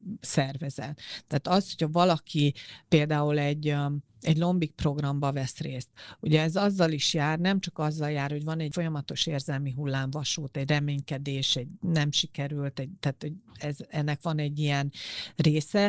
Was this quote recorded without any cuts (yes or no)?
yes